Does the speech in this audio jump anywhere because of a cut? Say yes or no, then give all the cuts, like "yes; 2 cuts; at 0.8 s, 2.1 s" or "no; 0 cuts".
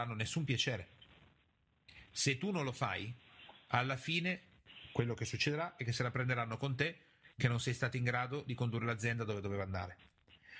yes; 1 cut; at 2.1 s